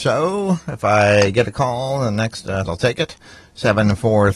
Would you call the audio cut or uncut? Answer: cut